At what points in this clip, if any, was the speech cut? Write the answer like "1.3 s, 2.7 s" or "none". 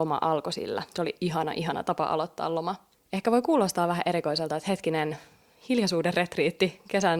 none